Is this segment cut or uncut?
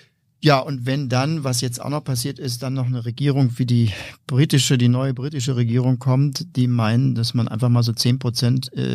uncut